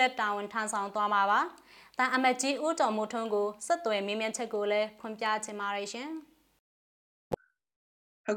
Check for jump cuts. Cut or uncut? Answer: uncut